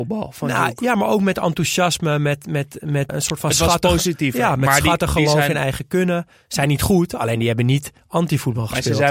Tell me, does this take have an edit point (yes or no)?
yes